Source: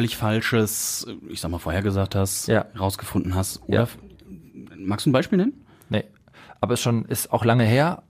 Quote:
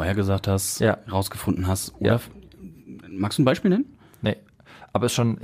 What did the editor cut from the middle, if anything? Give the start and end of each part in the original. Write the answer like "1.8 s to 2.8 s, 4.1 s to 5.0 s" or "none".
none